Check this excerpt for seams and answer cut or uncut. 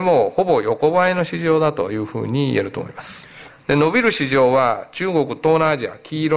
cut